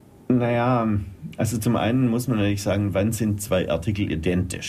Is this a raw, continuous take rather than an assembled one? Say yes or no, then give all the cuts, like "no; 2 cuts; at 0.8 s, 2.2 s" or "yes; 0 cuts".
yes; 0 cuts